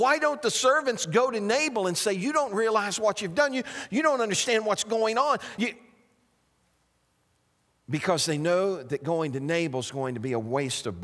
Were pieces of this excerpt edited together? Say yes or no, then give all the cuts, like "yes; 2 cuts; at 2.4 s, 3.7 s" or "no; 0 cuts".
no; 0 cuts